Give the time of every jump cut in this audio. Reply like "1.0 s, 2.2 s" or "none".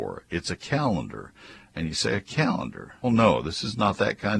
3.0 s